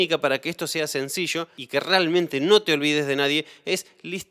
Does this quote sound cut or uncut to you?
uncut